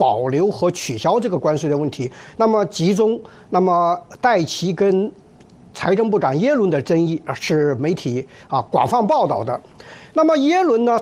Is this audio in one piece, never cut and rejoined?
yes; 0 cuts

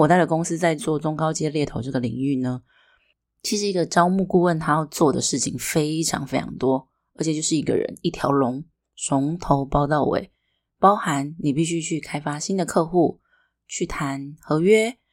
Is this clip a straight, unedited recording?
yes; 0 cuts

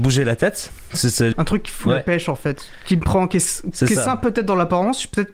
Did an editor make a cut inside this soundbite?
yes; 1 cut; at 1.3 s

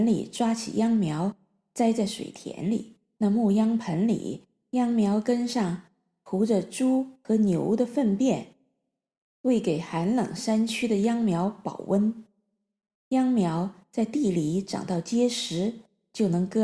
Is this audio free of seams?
no; 1 cut; at 3.2 s

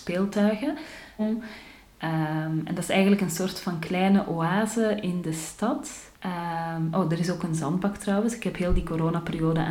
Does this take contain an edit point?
yes; 2 cuts; at 1.2 s, 6.1 s

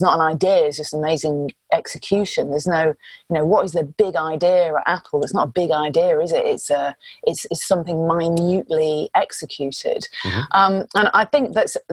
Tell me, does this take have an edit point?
no; 0 cuts

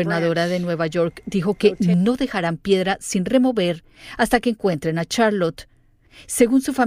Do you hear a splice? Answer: no; 0 cuts

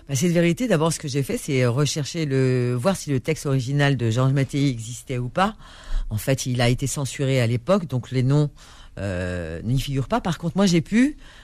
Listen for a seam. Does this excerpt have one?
no; 0 cuts

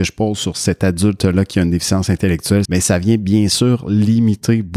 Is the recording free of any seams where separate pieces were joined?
no; 1 cut; at 2.7 s

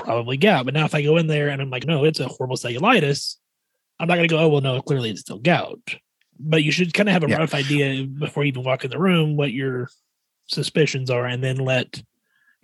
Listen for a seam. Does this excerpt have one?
yes; 1 cut; at 1.8 s

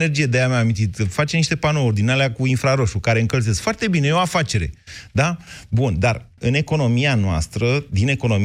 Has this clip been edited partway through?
yes; 1 cut; at 6.4 s

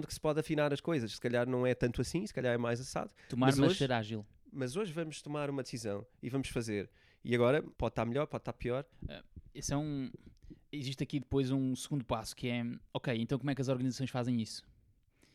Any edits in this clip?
yes; 2 cuts; at 7.7 s, 8.9 s

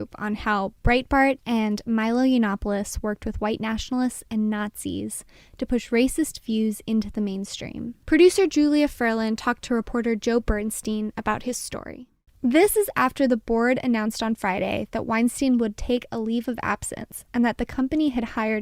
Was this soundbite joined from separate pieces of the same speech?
yes; 2 cuts; at 8.0 s, 12.3 s

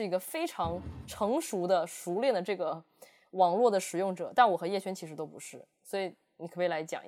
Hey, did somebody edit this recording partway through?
no; 0 cuts

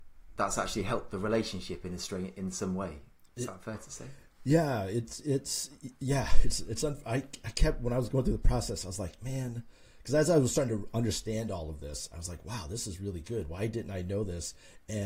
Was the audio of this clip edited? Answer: no; 0 cuts

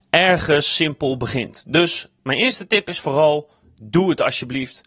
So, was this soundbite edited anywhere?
no; 0 cuts

